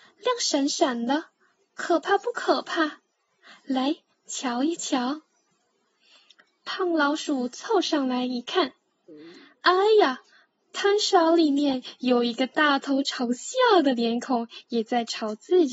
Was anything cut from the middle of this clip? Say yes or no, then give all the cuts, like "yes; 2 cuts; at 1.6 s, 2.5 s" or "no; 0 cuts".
no; 0 cuts